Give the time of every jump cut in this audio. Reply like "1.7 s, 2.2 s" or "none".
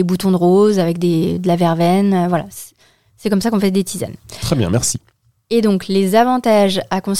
none